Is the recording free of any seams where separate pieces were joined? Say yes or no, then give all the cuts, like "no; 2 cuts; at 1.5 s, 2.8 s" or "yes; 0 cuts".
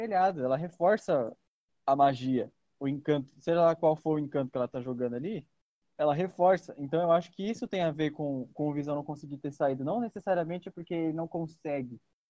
yes; 0 cuts